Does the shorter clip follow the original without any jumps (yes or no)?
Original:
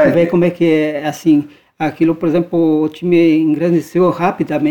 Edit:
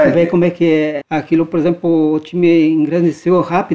no